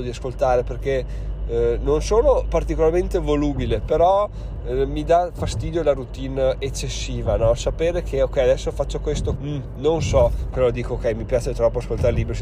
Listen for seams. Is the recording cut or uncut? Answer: cut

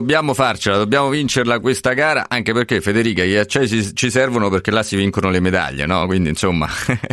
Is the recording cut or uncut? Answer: uncut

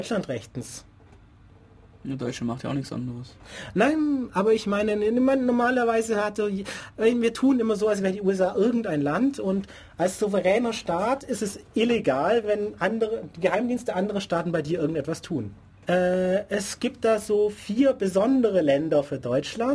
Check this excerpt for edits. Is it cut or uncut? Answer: cut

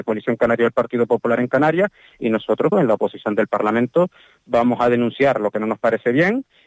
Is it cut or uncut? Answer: cut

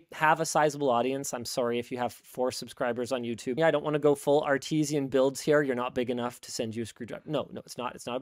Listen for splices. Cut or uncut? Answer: cut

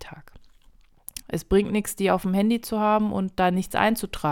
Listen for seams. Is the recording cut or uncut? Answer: cut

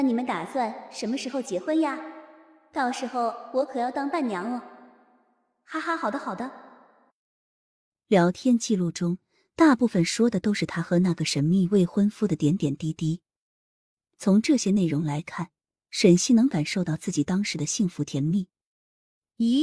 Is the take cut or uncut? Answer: uncut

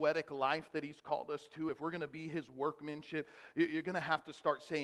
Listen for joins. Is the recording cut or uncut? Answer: uncut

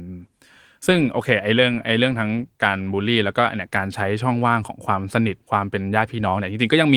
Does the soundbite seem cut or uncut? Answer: cut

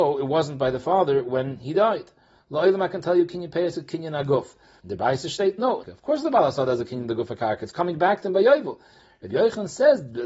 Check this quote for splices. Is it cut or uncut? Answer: cut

